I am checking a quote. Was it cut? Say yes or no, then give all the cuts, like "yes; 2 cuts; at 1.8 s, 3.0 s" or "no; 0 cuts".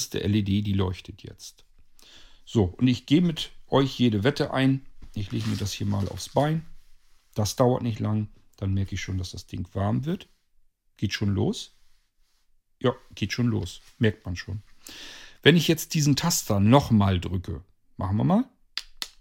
no; 0 cuts